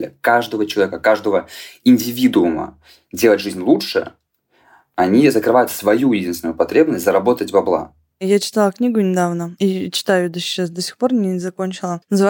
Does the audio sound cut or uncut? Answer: uncut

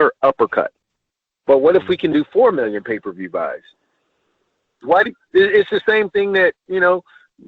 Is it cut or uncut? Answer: cut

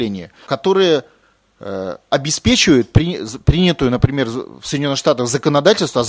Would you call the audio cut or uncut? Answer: uncut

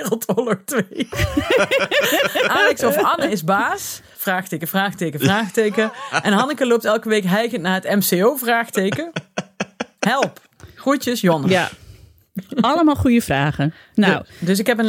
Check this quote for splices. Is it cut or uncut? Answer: cut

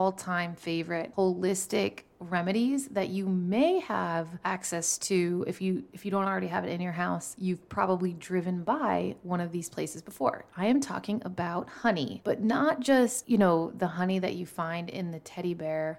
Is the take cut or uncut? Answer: cut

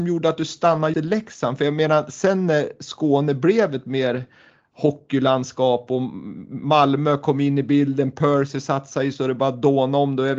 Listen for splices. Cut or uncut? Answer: cut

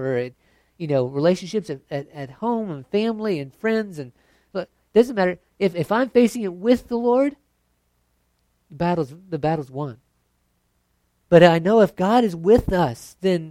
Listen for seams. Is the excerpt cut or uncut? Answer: cut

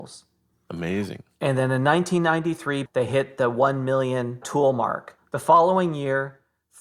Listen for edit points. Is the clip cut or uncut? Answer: cut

